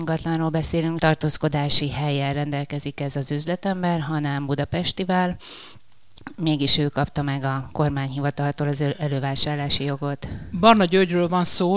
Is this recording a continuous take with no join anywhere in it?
no; 1 cut; at 1.0 s

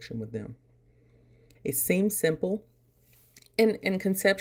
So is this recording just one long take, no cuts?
no; 1 cut; at 1.6 s

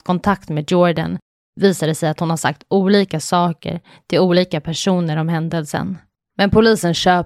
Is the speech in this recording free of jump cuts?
no; 1 cut; at 6.2 s

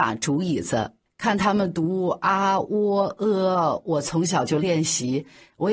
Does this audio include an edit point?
yes; 1 cut; at 1.1 s

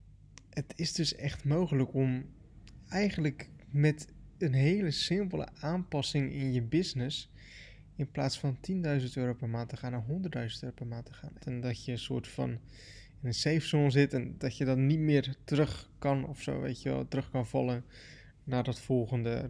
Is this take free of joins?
no; 1 cut; at 11.4 s

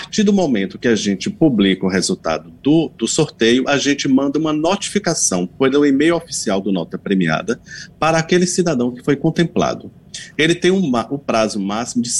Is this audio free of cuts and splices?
yes; 0 cuts

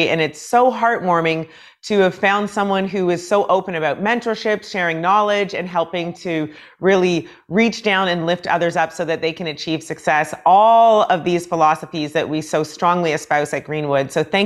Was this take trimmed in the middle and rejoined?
no; 0 cuts

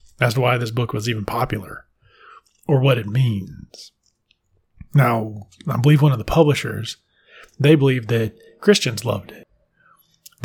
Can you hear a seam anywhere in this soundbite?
no; 0 cuts

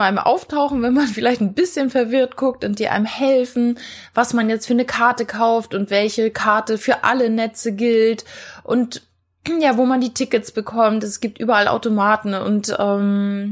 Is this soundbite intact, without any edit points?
yes; 0 cuts

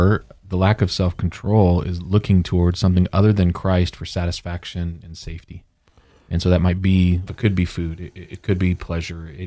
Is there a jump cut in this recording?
yes; 1 cut; at 7.3 s

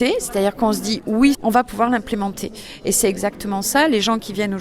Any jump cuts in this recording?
yes; 1 cut; at 1.3 s

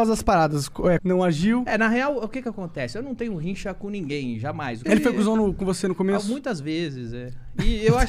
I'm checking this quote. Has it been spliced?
yes; 2 cuts; at 1.0 s, 4.8 s

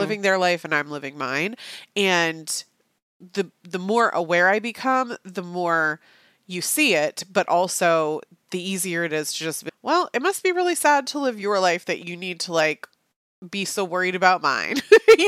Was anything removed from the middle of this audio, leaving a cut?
yes; 1 cut; at 9.7 s

